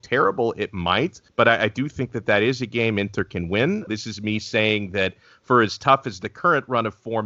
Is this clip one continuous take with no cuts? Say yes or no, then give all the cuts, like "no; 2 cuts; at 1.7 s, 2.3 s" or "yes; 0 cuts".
no; 2 cuts; at 1.3 s, 3.9 s